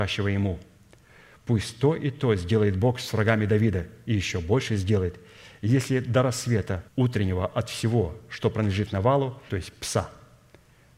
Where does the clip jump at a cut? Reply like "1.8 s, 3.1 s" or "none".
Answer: 1.4 s, 6.9 s, 9.5 s

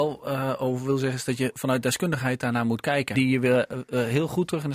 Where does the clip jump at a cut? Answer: 3.1 s

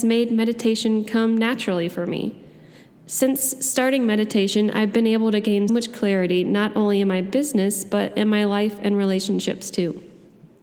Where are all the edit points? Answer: 5.7 s

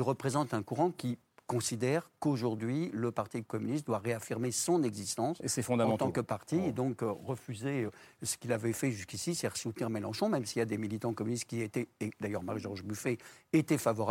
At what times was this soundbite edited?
none

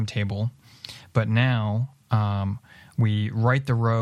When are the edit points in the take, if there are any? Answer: none

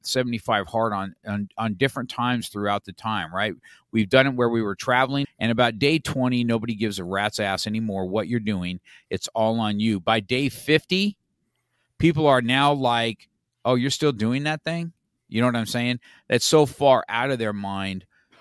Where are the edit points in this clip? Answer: 5.2 s

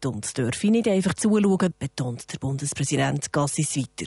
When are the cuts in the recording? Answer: 1.7 s

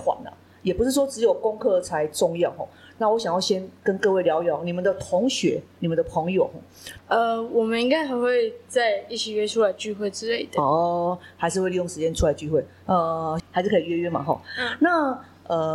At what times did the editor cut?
7.0 s, 13.4 s

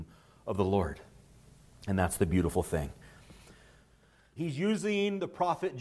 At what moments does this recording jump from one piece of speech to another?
4.4 s

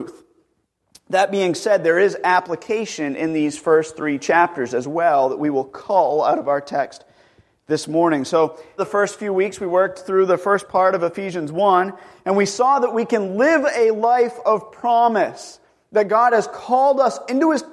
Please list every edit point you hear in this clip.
8.8 s

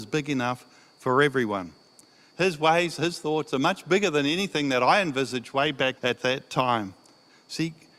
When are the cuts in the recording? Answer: 2.3 s, 6.0 s

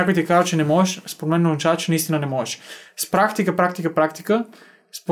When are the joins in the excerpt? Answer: none

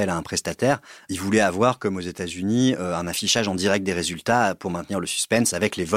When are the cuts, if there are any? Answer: none

